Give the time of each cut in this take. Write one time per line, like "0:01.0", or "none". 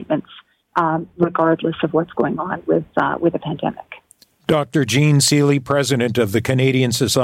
none